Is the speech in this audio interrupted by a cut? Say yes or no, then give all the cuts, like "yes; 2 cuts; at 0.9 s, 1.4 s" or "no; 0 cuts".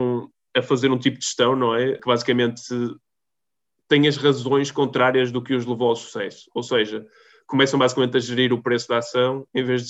no; 0 cuts